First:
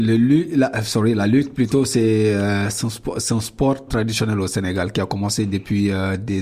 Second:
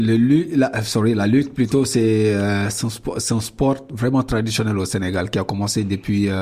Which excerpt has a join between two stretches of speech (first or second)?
first